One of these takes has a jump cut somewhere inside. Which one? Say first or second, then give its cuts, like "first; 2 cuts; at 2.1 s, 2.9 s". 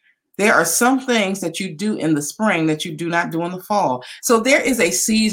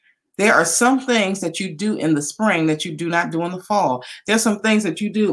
first; 1 cut; at 4.2 s